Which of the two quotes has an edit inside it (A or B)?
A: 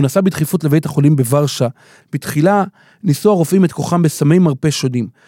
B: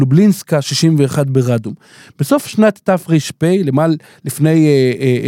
A